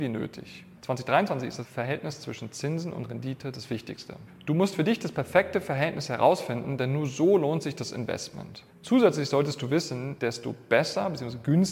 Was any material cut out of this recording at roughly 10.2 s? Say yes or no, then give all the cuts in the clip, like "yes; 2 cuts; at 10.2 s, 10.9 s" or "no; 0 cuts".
yes; 1 cut; at 10.2 s